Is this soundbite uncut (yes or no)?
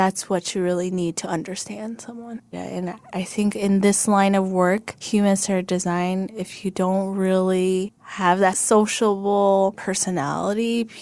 no